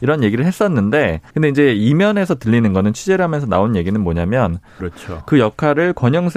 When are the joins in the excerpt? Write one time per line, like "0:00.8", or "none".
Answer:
0:01.3
0:04.8